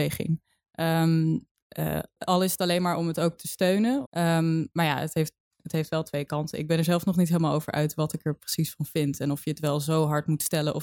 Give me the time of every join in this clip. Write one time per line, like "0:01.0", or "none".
0:02.2
0:04.1